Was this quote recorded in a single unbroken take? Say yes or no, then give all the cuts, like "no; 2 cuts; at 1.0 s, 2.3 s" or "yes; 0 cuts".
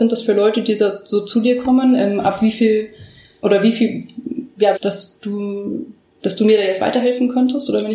no; 2 cuts; at 3.4 s, 4.7 s